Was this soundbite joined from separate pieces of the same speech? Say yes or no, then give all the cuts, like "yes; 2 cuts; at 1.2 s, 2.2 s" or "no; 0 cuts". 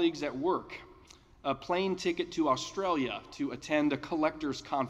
no; 0 cuts